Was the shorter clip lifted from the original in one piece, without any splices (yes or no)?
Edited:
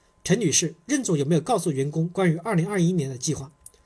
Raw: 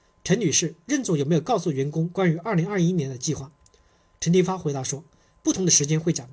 yes